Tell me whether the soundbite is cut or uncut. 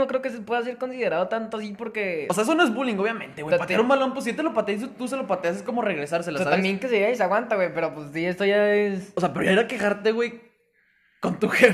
uncut